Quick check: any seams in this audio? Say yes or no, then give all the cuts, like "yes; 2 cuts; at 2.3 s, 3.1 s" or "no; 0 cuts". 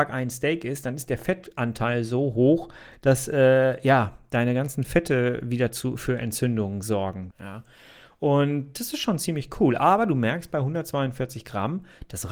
yes; 1 cut; at 7.3 s